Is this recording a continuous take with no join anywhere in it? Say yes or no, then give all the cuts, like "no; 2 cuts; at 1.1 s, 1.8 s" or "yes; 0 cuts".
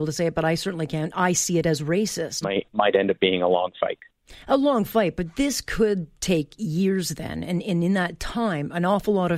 no; 1 cut; at 2.4 s